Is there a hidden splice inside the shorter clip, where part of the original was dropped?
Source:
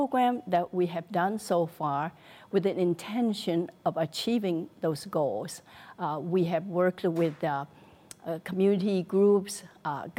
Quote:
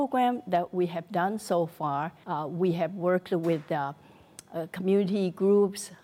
yes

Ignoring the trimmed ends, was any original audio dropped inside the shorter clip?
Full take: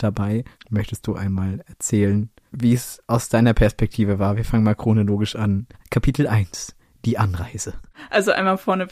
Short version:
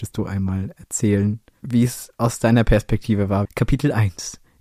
yes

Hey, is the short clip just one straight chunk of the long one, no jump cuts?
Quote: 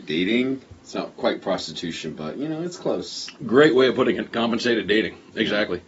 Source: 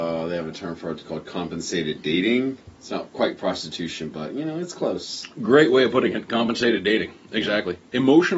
yes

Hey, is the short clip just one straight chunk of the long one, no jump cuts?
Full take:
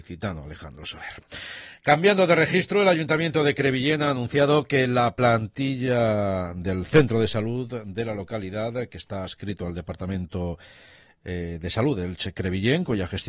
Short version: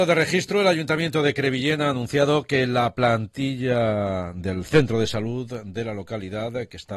yes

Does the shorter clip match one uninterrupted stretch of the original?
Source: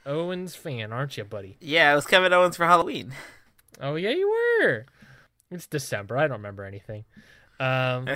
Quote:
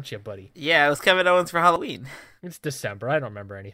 no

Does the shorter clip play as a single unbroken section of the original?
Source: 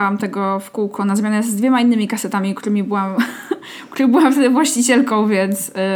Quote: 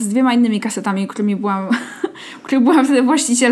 yes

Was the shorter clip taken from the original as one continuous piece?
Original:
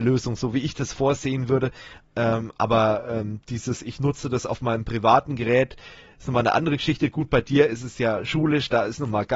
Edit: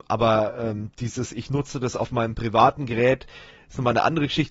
yes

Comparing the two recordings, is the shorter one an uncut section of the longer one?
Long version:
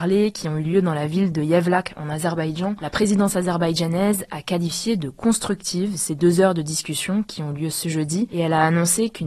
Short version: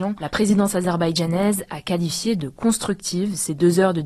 yes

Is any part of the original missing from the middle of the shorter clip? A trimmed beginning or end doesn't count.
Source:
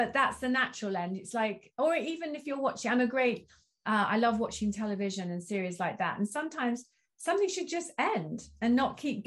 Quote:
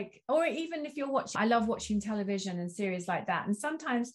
yes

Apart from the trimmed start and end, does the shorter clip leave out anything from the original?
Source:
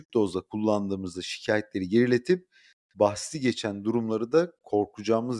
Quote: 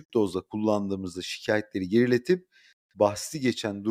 no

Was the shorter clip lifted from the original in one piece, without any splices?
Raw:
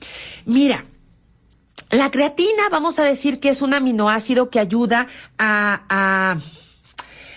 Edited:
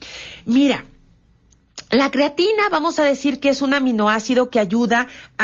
yes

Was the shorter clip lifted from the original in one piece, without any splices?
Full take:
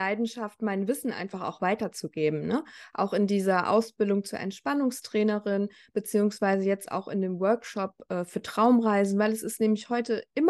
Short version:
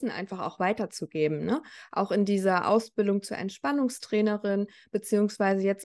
yes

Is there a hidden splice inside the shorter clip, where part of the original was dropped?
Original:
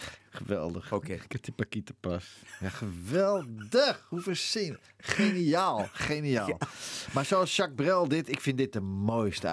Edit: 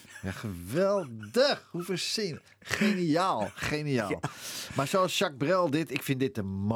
no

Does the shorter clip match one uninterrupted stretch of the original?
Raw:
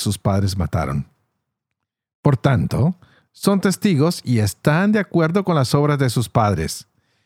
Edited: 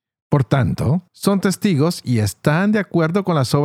no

